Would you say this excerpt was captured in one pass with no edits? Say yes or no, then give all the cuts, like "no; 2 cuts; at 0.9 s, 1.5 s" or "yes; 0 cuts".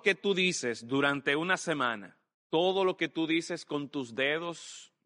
no; 1 cut; at 2.3 s